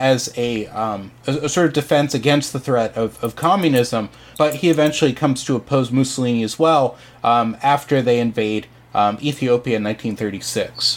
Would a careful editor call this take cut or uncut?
cut